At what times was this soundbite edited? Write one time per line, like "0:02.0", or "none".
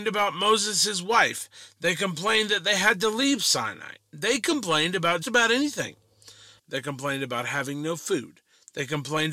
0:05.2
0:06.6